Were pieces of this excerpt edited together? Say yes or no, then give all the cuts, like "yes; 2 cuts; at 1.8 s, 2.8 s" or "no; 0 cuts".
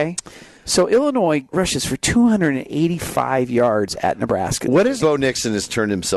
yes; 2 cuts; at 1.5 s, 5.0 s